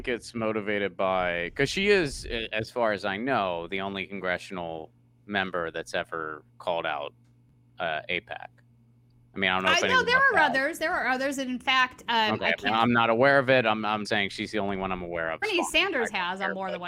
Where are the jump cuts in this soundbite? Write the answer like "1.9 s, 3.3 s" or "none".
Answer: 14.0 s, 15.4 s